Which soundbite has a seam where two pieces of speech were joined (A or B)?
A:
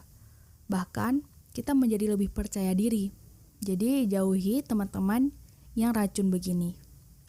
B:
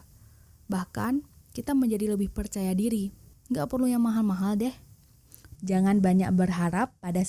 B